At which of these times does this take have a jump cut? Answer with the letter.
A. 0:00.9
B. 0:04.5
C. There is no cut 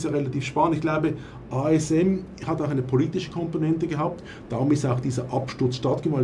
C